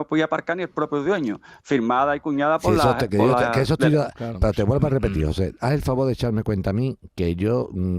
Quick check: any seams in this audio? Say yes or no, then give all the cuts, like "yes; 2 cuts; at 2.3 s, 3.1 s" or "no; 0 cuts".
no; 0 cuts